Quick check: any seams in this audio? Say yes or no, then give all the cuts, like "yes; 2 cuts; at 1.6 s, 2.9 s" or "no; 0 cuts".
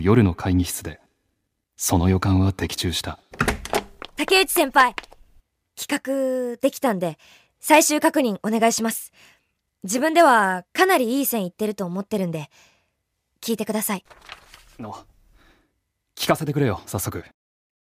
no; 0 cuts